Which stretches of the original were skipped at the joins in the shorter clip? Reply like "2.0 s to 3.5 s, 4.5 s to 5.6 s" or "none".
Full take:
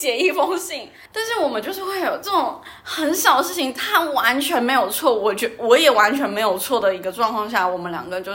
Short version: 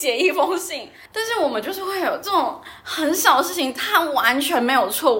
none